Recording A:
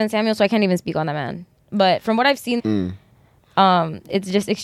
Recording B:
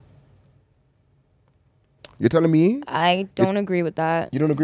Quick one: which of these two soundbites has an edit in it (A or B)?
A